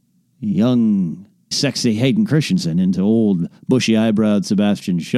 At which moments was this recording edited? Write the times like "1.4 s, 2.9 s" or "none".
1.5 s